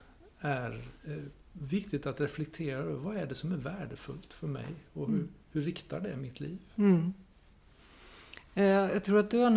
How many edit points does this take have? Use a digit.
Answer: 1